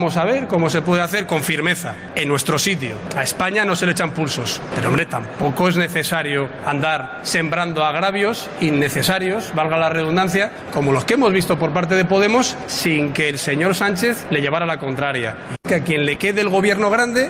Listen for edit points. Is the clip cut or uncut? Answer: cut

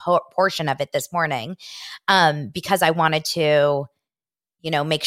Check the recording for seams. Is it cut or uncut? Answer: uncut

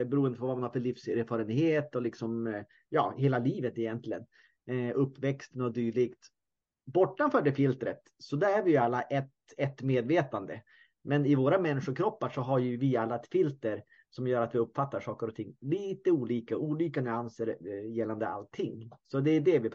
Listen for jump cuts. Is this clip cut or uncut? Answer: uncut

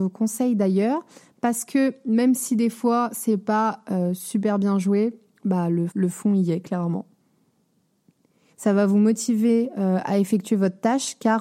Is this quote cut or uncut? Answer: cut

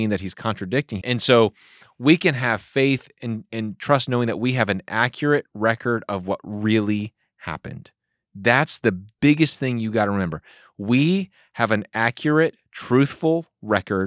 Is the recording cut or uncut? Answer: cut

